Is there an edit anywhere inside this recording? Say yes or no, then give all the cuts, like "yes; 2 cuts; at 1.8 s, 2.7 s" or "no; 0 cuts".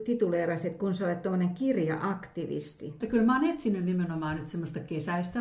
yes; 1 cut; at 3.0 s